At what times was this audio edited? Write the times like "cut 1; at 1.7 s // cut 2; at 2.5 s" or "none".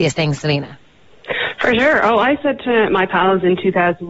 none

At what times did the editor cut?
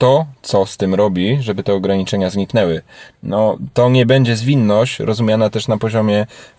cut 1; at 3.1 s

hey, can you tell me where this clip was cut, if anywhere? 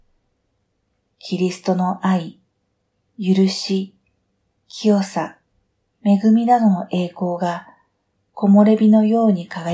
none

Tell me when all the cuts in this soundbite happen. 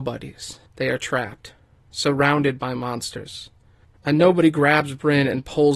none

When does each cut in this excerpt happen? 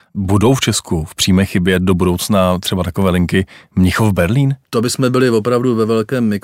cut 1; at 4.6 s

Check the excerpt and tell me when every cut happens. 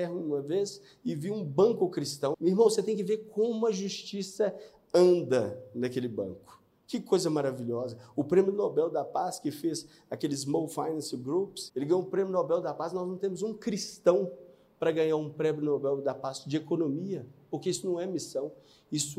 cut 1; at 2.3 s // cut 2; at 11.7 s

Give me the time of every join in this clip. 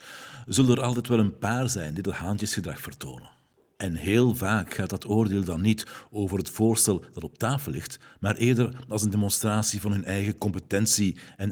none

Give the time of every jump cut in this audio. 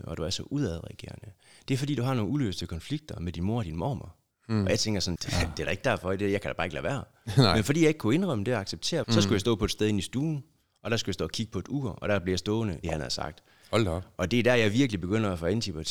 cut 1; at 5.2 s // cut 2; at 9.0 s // cut 3; at 12.8 s

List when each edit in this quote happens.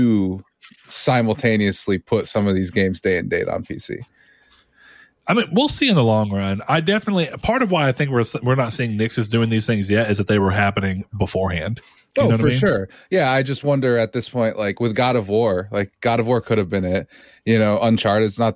none

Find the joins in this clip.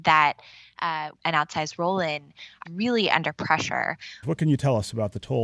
cut 1; at 1.1 s // cut 2; at 2.7 s // cut 3; at 4.2 s

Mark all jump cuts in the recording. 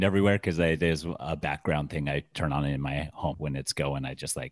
cut 1; at 3.3 s

